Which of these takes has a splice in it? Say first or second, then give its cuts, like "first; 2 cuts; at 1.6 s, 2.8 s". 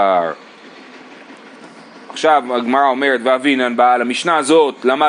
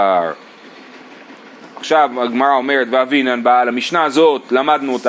second; 1 cut; at 1.7 s